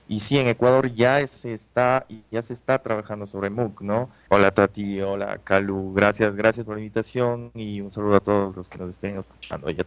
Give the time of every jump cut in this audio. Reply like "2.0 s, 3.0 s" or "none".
4.3 s